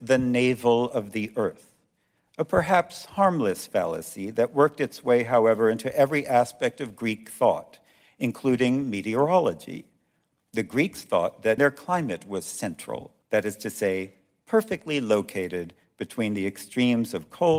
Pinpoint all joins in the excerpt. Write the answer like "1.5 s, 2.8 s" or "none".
11.6 s, 13.2 s